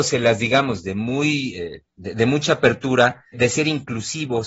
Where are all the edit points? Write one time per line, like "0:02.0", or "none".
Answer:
0:03.3